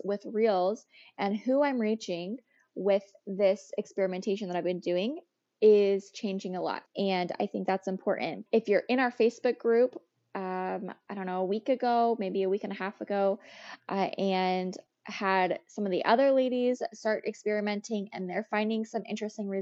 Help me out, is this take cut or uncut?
cut